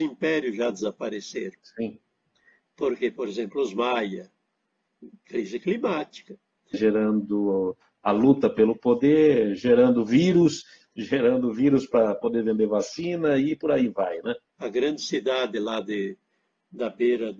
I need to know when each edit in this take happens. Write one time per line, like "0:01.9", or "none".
0:06.7
0:14.5

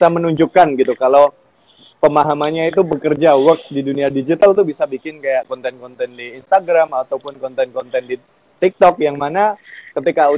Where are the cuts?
none

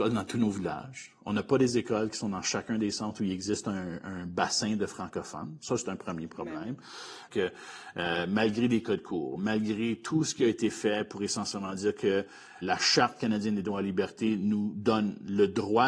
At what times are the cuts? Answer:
0:07.3
0:12.6

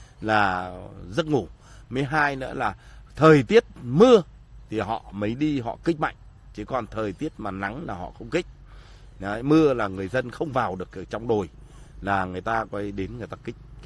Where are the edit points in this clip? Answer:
none

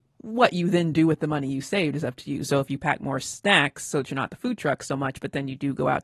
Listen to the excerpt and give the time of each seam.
none

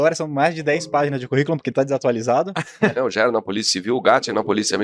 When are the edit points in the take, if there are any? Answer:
0:03.0

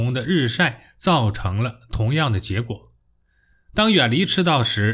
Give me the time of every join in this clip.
none

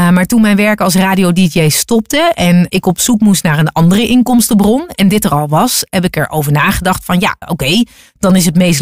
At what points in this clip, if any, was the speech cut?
0:02.7
0:07.4

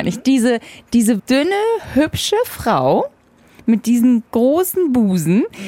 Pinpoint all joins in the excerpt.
0:01.2

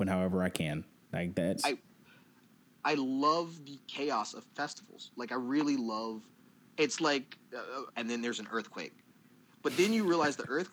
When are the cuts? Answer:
0:01.6
0:07.9

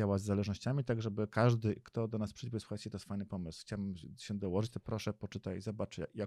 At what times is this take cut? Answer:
none

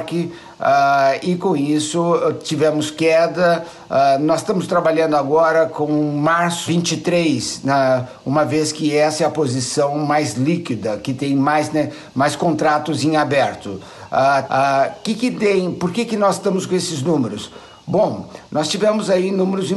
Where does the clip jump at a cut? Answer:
0:06.7
0:14.5

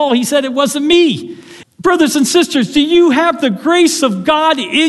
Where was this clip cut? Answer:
0:01.6

